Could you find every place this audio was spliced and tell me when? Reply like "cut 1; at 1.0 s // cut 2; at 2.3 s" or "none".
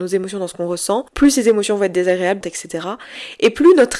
cut 1; at 1.1 s // cut 2; at 2.4 s